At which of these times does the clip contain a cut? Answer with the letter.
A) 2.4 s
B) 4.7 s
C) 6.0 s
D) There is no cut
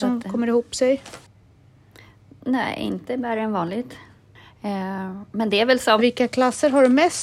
C